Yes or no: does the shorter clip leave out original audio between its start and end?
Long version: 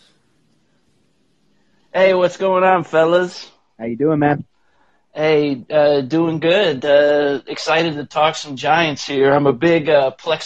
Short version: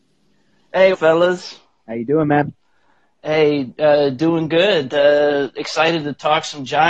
yes